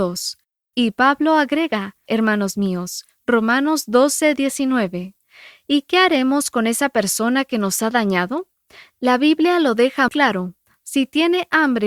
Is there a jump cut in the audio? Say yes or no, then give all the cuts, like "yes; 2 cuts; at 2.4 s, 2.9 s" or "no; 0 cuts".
yes; 2 cuts; at 2.1 s, 10.1 s